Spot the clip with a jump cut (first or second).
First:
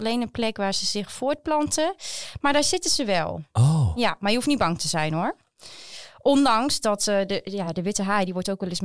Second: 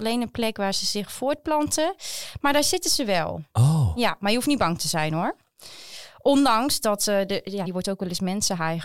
second